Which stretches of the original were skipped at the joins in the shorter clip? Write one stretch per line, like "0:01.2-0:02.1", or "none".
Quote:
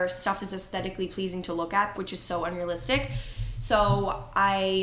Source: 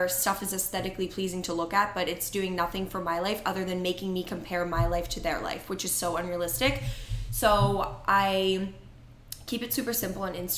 0:01.9-0:05.7